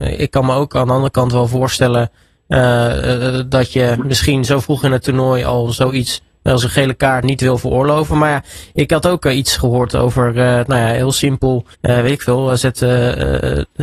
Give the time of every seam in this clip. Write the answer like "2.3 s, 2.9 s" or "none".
7.2 s, 11.7 s